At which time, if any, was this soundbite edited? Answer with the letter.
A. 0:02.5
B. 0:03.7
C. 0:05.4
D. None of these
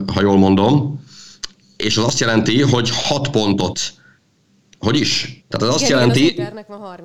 C